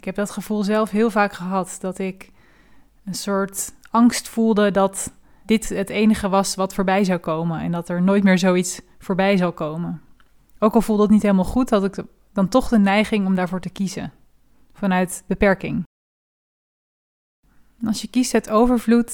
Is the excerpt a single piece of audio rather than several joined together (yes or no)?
no